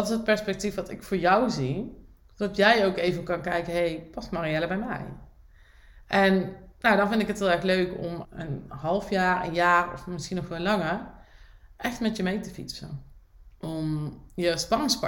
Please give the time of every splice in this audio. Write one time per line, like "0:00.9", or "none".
0:08.2
0:13.5